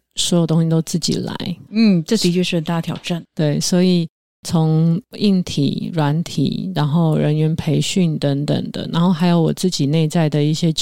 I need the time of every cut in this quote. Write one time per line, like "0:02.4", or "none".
0:01.7